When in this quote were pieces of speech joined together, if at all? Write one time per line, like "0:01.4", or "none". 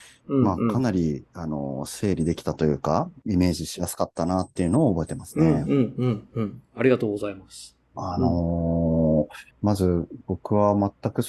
0:07.9
0:09.5